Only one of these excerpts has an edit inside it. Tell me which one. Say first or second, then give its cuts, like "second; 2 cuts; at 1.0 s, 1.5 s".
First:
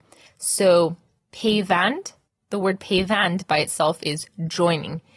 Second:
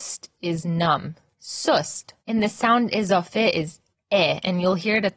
second; 1 cut; at 2.2 s